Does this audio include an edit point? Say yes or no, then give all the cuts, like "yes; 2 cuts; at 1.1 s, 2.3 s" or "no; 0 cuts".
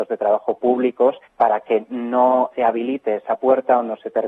yes; 2 cuts; at 1.3 s, 2.5 s